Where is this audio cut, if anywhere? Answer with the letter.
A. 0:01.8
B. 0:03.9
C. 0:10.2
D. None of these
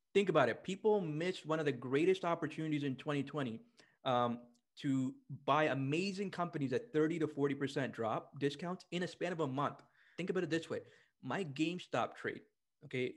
C